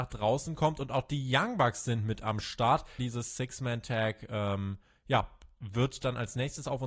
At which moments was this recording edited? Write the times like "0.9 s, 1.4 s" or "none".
3.0 s